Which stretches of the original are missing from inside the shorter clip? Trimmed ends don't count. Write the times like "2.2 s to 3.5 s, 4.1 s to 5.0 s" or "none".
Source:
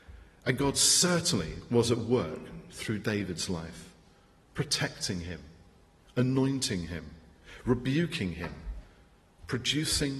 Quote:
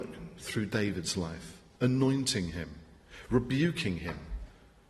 4.1 s to 6.1 s